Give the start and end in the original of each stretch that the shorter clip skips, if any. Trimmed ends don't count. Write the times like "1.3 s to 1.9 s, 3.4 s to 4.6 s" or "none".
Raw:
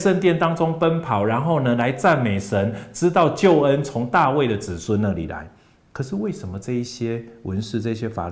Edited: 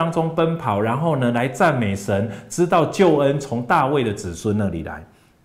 none